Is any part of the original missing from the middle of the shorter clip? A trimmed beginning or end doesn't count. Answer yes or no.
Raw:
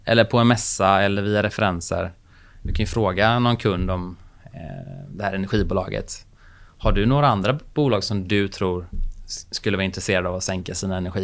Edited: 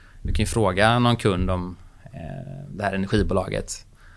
no